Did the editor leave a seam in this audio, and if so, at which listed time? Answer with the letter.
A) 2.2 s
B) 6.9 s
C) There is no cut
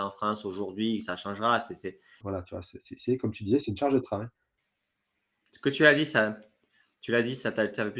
A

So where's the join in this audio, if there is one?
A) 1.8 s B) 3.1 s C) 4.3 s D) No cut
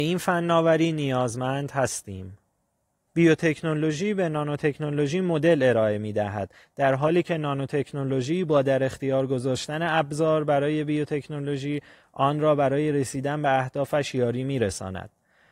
B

